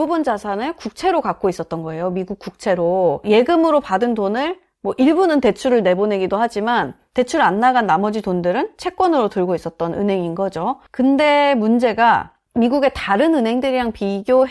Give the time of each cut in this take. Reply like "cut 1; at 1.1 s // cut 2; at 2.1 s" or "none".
none